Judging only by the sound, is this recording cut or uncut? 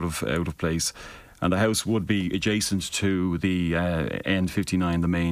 uncut